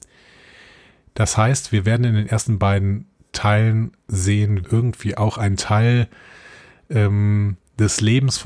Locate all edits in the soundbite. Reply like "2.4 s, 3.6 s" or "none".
4.6 s